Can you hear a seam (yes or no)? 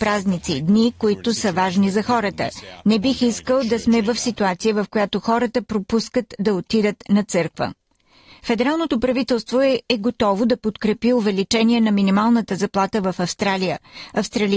no